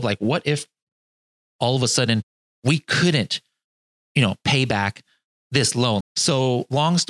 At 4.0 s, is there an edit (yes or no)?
no